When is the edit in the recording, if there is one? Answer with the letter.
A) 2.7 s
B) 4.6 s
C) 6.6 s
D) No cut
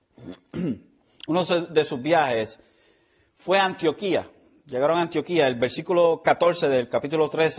D